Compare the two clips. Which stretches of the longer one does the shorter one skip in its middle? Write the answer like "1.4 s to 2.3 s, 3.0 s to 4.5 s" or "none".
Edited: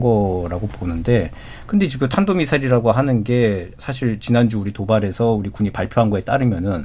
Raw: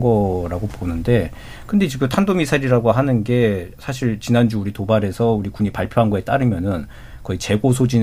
none